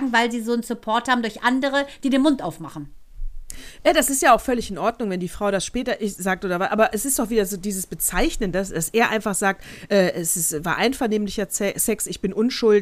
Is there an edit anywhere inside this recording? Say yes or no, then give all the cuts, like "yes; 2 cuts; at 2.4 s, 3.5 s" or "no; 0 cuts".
no; 0 cuts